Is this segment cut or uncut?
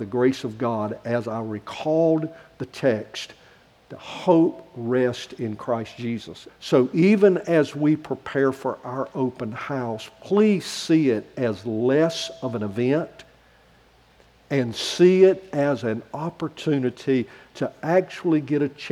cut